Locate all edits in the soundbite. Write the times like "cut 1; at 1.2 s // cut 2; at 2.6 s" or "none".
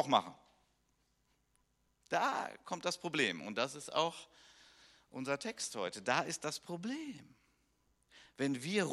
none